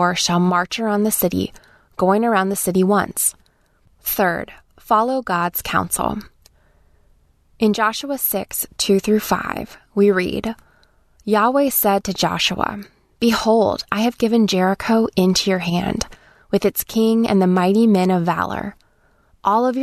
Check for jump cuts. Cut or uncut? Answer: cut